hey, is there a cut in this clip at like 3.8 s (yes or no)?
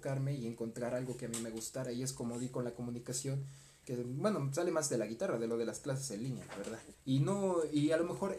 yes